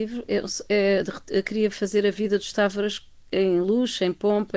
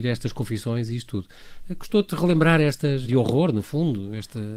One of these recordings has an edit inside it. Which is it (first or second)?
second